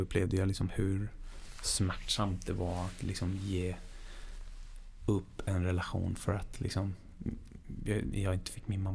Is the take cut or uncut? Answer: uncut